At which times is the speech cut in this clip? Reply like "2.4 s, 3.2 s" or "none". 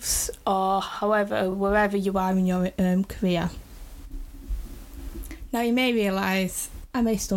none